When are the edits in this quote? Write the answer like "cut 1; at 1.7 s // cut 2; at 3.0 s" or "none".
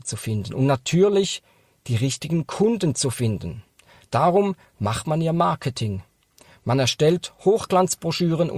none